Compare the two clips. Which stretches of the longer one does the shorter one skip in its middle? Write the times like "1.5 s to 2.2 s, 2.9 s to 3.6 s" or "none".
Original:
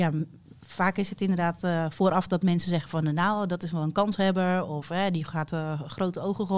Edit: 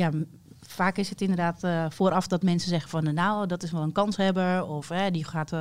none